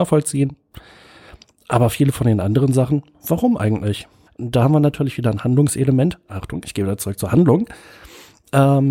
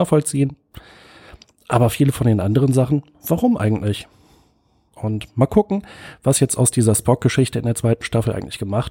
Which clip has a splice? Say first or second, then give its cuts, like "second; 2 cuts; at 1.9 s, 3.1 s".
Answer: first; 1 cut; at 4.3 s